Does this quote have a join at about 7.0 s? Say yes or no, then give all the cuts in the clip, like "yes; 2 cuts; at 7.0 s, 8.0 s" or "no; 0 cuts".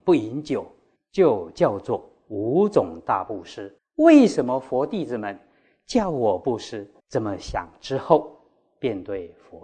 yes; 3 cuts; at 1.0 s, 3.8 s, 7.0 s